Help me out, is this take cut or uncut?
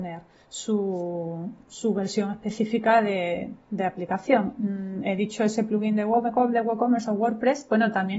uncut